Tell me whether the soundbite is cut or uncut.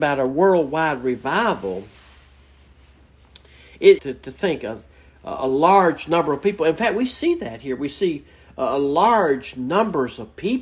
cut